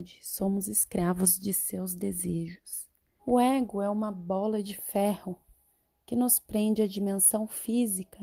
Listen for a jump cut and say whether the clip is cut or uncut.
cut